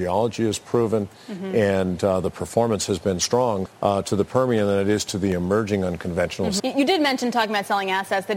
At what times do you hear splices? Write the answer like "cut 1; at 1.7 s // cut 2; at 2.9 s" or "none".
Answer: cut 1; at 3.7 s // cut 2; at 6.6 s